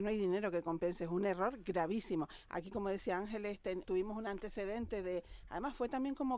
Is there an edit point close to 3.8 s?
yes; 1 cut; at 3.8 s

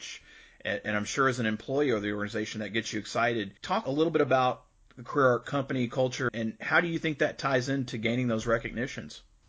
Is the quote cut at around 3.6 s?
yes; 2 cuts; at 3.6 s, 6.3 s

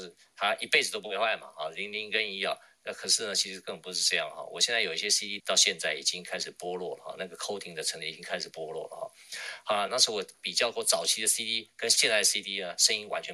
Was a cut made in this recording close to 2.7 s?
no; 2 cuts; at 5.4 s, 9.9 s

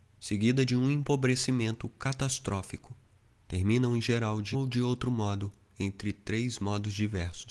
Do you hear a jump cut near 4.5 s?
yes; 2 cuts; at 3.4 s, 4.5 s

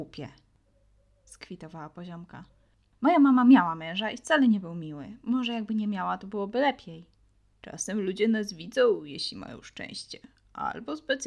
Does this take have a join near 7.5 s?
yes; 1 cut; at 7.5 s

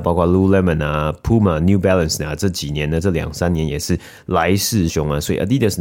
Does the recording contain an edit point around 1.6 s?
no; 1 cut; at 4.9 s

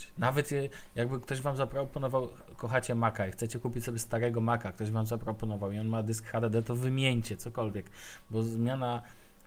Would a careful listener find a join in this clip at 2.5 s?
no; 0 cuts

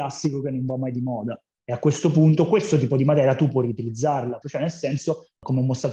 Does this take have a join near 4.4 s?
yes; 2 cuts; at 1.5 s, 4.4 s

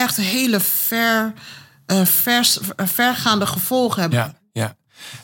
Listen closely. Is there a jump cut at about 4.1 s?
yes; 1 cut; at 4.1 s

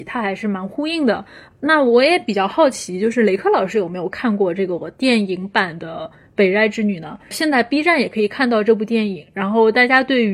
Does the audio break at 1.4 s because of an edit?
no; 1 cut; at 7.3 s

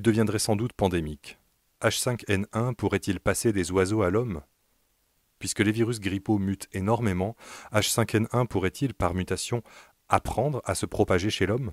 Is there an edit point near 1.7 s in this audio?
yes; 1 cut; at 1.7 s

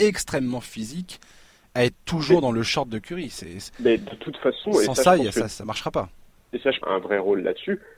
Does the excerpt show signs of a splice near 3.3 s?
no; 1 cut; at 6.8 s

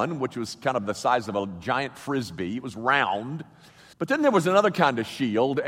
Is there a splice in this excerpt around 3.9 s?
yes; 1 cut; at 3.9 s

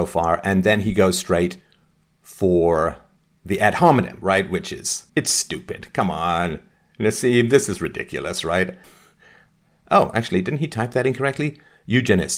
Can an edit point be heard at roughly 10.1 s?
no; 2 cuts; at 5.1 s, 8.8 s

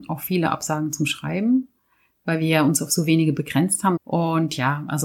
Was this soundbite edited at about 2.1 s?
no; 1 cut; at 4.0 s

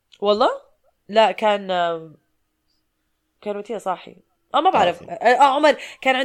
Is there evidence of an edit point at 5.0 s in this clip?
yes; 2 cuts; at 0.9 s, 5.0 s

